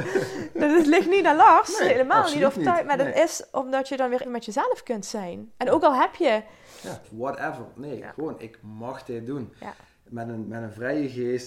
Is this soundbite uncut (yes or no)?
no